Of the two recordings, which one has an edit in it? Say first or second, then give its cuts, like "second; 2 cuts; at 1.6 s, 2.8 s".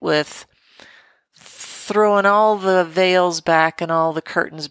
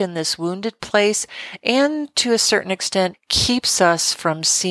second; 1 cut; at 3.1 s